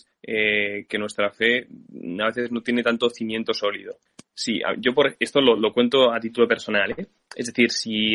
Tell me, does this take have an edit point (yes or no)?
no